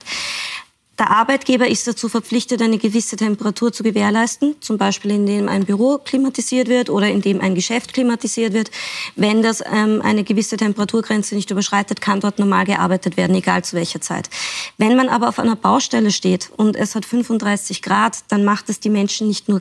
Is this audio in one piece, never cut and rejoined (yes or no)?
yes